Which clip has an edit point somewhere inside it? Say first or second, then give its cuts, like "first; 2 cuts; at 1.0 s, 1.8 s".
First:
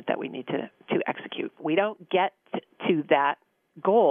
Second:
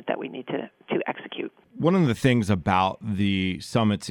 first; 1 cut; at 1.6 s